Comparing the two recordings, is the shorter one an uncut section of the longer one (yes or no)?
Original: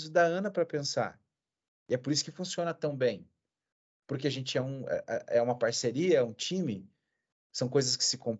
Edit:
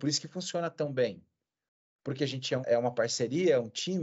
no